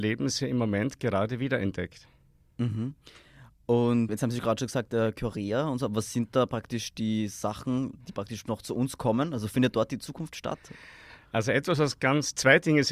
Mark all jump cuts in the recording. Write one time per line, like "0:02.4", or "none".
0:04.1